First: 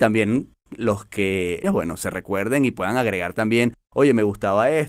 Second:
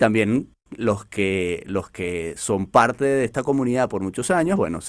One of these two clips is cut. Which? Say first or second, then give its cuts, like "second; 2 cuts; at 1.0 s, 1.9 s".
first; 1 cut; at 1.6 s